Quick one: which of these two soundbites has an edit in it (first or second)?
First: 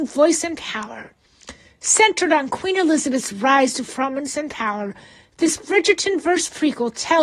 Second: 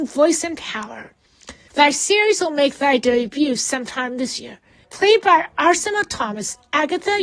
second